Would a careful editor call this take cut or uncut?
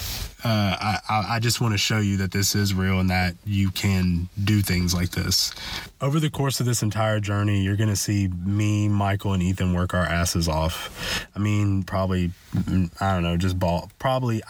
cut